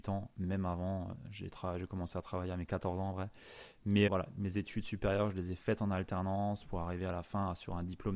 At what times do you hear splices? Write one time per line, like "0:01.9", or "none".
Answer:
0:04.1